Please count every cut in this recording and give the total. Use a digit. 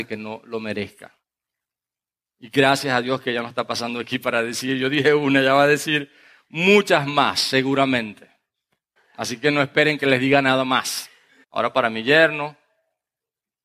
2